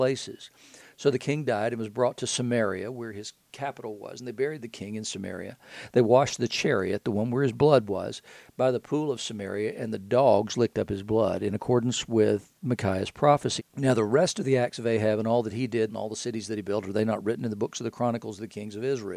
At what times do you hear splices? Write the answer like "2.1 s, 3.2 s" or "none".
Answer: 13.6 s, 15.9 s